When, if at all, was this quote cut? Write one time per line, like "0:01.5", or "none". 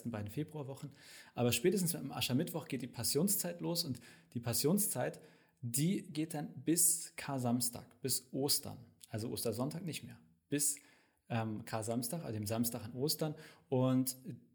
none